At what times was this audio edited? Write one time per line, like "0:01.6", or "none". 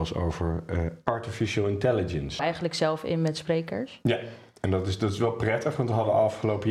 0:02.4